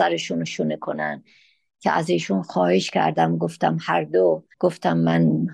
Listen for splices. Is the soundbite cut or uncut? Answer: uncut